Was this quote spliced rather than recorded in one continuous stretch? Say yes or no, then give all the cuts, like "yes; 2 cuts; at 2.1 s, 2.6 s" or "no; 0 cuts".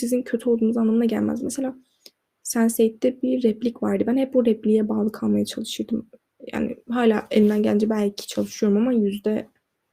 no; 0 cuts